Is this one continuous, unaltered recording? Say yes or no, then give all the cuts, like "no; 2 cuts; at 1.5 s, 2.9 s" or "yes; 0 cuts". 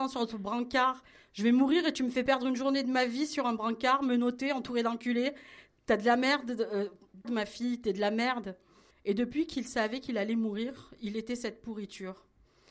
no; 2 cuts; at 7.2 s, 8.9 s